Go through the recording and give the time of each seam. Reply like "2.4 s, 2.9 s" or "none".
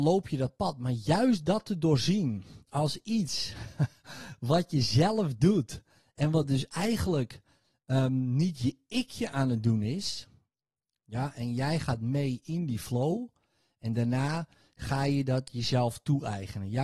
11.0 s